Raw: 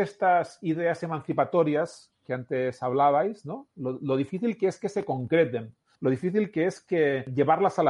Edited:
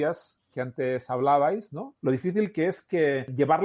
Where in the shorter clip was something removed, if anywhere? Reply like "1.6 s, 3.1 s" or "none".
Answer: 2.0 s